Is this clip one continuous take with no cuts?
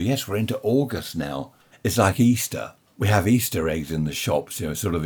no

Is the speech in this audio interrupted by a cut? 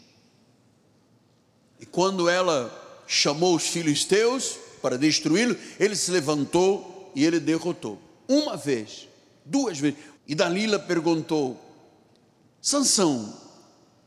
yes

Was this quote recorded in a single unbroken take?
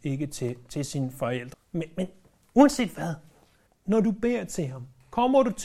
no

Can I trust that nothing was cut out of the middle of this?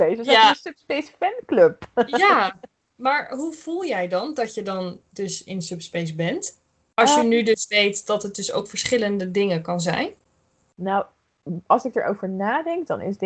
yes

